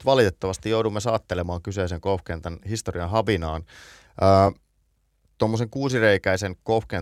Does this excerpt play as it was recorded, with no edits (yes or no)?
yes